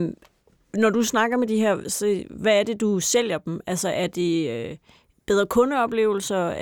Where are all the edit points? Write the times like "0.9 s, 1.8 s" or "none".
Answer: 1.8 s